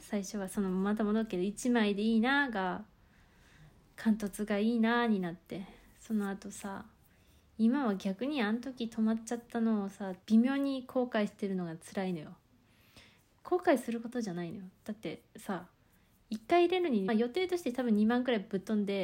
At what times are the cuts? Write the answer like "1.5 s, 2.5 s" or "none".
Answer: 10.2 s, 17.1 s